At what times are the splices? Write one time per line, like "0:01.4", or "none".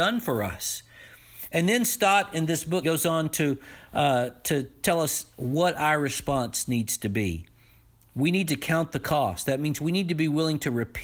0:02.8

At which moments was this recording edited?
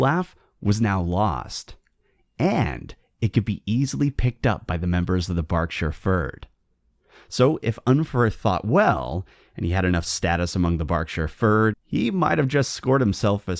0:11.7

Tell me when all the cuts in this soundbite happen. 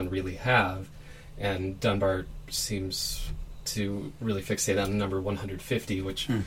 none

